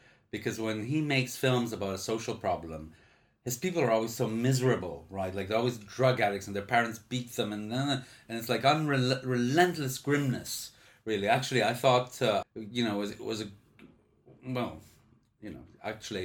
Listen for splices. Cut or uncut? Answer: cut